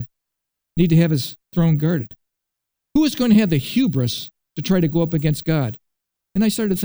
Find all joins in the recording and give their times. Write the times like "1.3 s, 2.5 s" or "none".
2.9 s